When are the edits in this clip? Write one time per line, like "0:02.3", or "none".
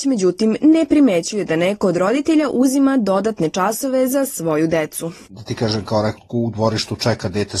0:06.2